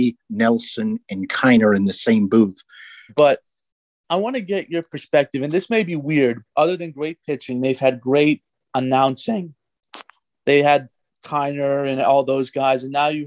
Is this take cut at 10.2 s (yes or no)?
no